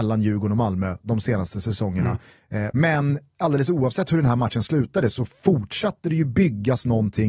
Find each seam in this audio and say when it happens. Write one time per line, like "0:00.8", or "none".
0:02.7